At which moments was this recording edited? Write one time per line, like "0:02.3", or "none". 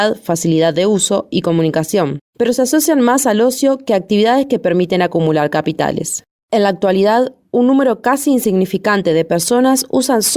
0:06.4